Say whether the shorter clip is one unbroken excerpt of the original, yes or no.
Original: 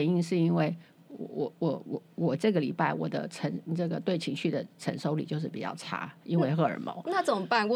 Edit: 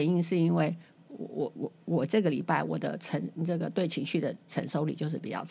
no